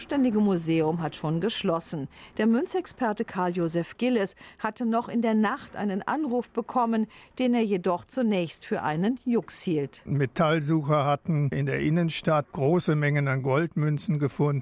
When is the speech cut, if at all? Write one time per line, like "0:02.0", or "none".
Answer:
0:02.3